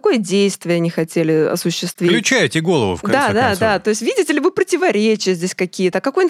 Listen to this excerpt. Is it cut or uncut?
uncut